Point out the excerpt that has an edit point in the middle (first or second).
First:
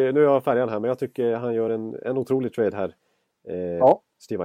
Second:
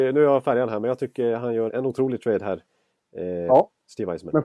second